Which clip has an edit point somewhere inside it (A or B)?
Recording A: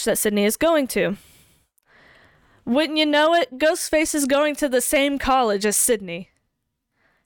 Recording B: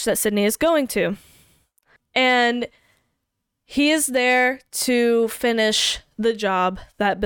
B